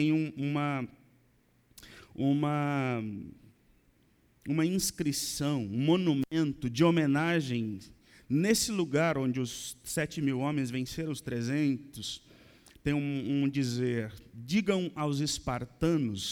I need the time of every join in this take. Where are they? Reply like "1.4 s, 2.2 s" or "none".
none